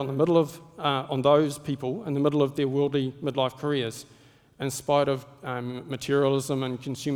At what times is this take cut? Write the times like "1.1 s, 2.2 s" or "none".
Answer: none